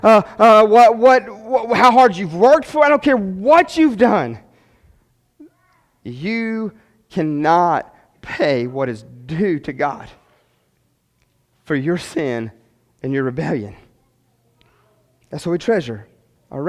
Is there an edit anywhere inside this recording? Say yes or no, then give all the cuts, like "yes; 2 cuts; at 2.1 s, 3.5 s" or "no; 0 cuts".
no; 0 cuts